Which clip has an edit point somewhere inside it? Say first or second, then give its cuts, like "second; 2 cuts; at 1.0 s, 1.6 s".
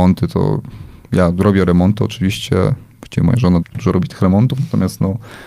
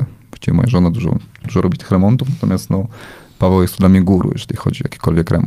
first; 1 cut; at 3.6 s